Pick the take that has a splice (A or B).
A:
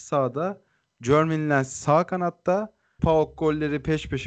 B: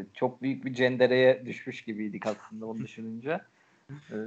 A